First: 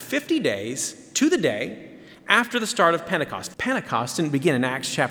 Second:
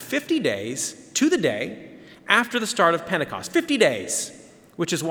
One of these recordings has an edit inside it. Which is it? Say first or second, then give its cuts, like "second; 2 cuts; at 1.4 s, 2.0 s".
first; 1 cut; at 3.5 s